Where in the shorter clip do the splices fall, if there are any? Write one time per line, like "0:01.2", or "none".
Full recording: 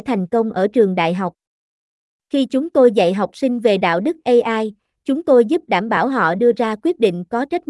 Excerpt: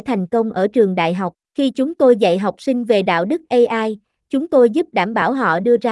0:01.4